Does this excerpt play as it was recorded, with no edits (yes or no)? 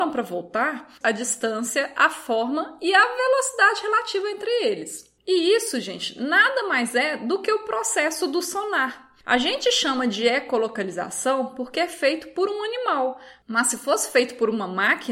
no